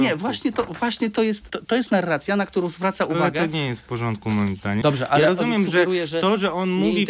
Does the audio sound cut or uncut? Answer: cut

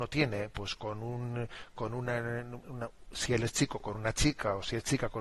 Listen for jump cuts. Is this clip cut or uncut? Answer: uncut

